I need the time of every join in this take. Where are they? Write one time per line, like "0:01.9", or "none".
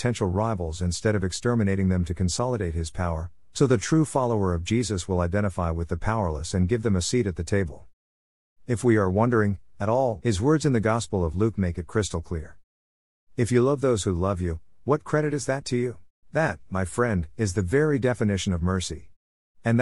0:10.2
0:16.2